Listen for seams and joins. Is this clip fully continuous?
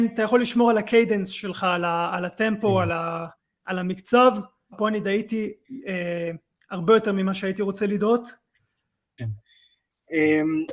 no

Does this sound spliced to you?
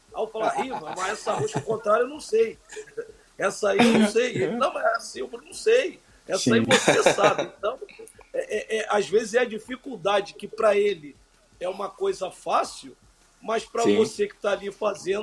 no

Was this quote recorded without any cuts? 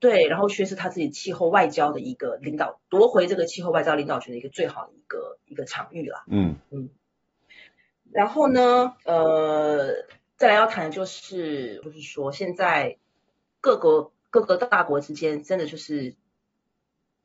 no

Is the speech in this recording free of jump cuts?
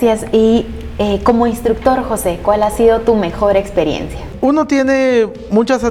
yes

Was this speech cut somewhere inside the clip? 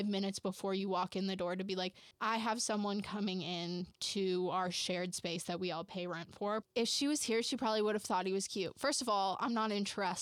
yes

